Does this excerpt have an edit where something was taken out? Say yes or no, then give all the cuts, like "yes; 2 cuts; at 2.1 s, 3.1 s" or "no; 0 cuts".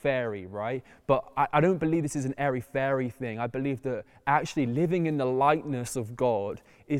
no; 0 cuts